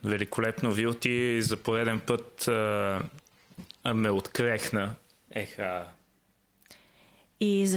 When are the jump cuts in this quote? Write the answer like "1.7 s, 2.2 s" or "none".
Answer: 5.3 s